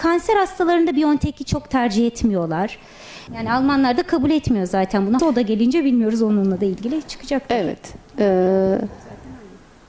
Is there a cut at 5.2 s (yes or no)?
yes